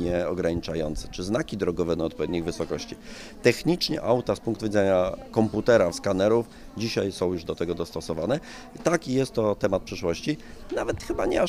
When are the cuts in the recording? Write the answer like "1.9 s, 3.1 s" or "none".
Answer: 5.9 s